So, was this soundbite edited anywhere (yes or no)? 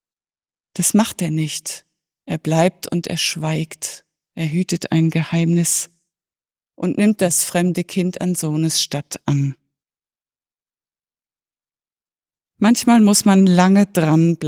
no